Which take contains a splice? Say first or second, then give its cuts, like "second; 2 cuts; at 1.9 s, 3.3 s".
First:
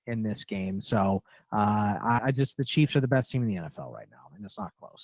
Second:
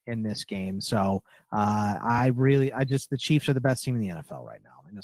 first; 1 cut; at 2.2 s